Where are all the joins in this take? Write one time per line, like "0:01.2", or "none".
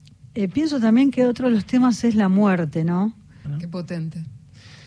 0:03.4